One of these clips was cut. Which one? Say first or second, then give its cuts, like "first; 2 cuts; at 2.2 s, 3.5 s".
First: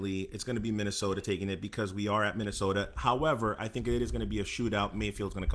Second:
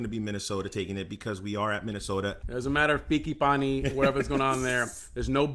second; 1 cut; at 2.4 s